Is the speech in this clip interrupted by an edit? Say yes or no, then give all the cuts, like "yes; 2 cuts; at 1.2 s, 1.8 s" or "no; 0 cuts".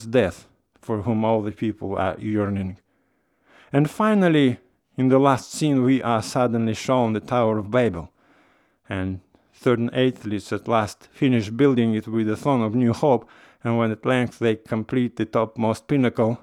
no; 0 cuts